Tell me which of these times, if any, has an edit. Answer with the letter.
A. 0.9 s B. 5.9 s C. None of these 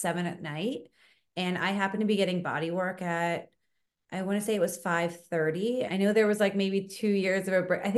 B